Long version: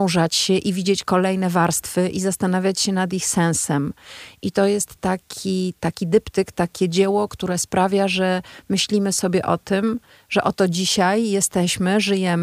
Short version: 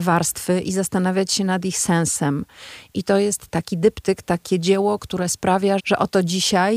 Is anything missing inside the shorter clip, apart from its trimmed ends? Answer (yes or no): yes